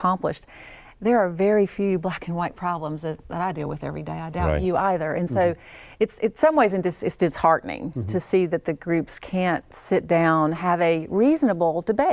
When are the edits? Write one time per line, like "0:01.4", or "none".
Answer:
none